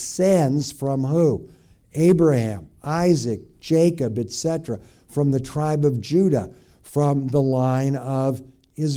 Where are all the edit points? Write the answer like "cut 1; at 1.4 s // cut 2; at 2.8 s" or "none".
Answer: none